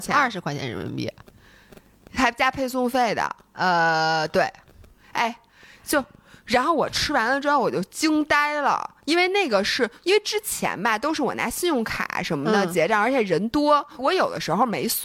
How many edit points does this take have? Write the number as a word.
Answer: one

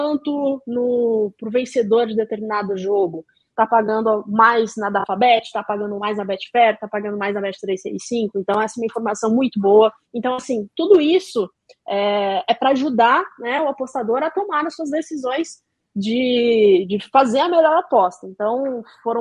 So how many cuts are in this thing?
one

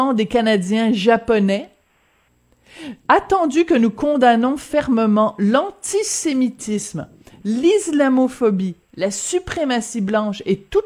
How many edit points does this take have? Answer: zero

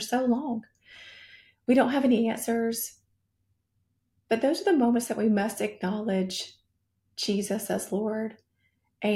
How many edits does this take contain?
zero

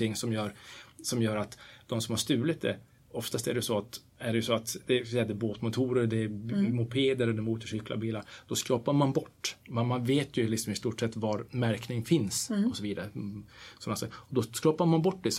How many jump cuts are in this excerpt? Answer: one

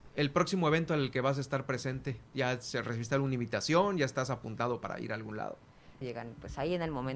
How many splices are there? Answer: one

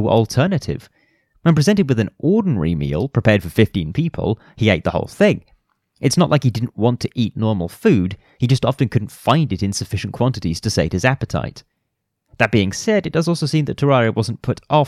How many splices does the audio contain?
zero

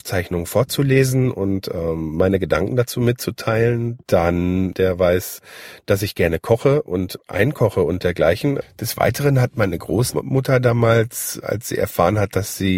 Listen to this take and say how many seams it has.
two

